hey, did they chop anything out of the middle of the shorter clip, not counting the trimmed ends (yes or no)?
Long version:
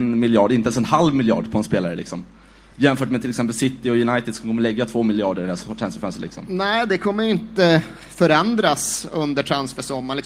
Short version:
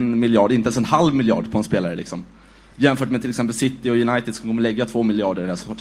no